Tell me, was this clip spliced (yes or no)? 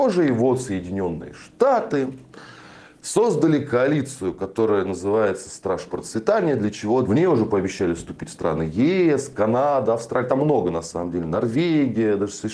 yes